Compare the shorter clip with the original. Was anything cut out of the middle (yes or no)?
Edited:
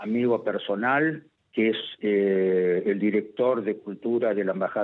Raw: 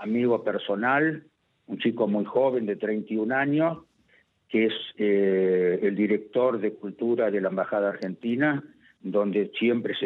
yes